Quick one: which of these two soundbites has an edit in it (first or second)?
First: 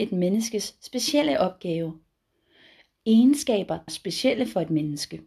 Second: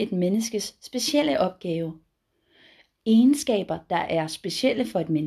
first